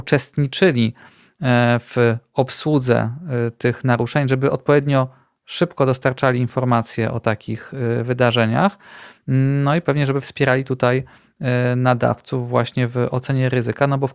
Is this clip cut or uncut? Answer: uncut